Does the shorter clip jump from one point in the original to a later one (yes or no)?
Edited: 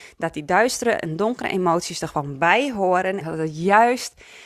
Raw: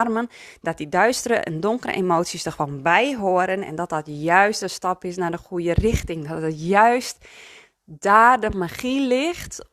yes